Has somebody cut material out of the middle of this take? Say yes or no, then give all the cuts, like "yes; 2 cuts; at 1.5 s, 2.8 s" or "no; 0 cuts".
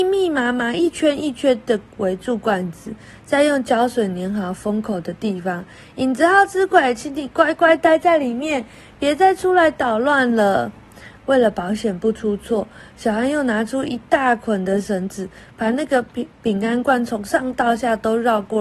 no; 0 cuts